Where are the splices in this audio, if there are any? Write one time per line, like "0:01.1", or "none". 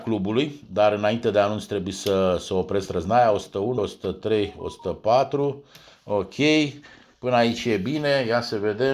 0:03.8